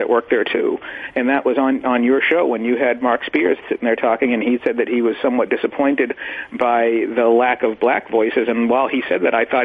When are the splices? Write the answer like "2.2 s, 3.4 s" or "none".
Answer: none